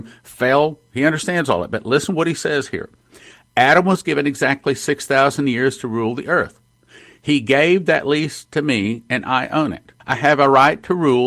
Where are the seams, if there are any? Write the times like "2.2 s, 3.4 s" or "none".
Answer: 10.0 s

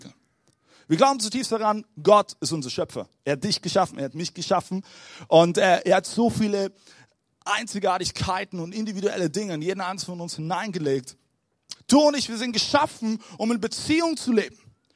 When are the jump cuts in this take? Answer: 11.7 s

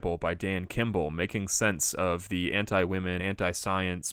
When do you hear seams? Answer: none

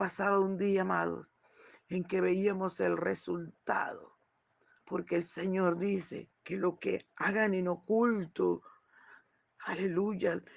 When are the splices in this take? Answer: 4.8 s, 6.4 s

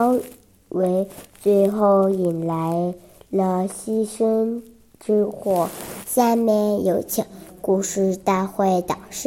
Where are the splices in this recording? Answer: 6.0 s

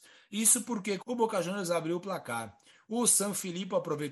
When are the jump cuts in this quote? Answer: 1.0 s

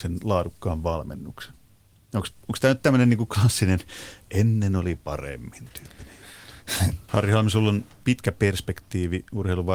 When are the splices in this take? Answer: 7.1 s

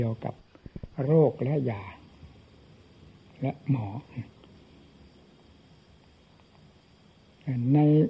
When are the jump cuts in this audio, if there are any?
none

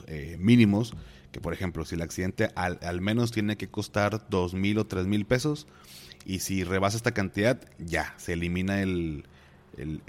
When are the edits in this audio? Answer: none

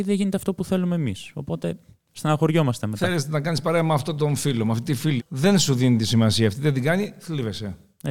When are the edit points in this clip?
5.2 s

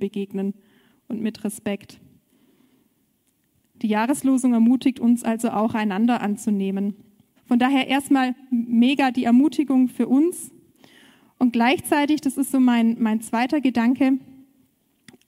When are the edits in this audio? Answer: 7.4 s

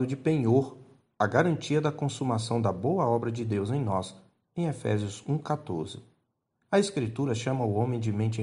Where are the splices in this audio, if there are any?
none

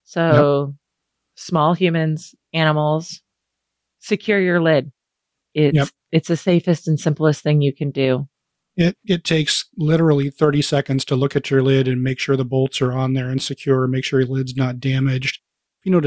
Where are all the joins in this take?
6.0 s

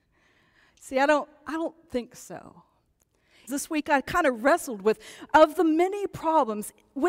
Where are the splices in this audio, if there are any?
3.5 s

